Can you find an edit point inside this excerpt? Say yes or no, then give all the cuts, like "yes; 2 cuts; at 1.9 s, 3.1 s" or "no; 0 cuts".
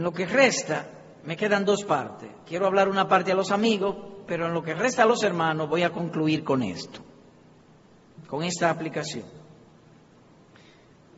no; 0 cuts